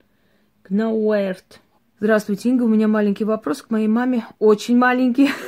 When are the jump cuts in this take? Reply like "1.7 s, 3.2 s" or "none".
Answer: 1.8 s